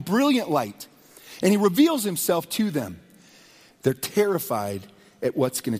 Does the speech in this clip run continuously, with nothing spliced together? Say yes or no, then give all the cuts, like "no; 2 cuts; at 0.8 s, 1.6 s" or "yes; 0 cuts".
no; 1 cut; at 3.7 s